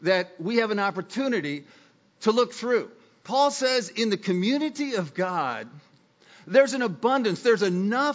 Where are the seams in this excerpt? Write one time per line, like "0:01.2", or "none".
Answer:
0:03.2

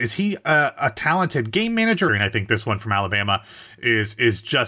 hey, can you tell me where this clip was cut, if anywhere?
0:02.1

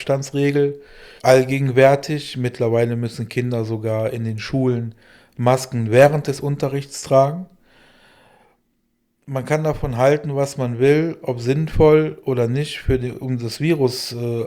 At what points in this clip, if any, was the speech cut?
0:01.2

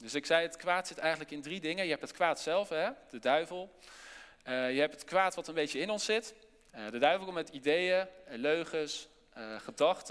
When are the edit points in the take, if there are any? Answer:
0:06.7

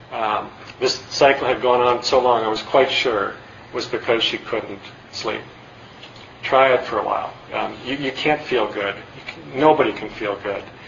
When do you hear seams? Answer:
0:07.5

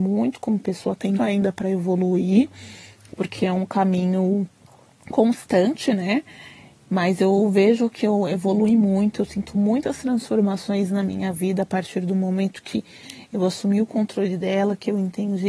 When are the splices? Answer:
0:01.2

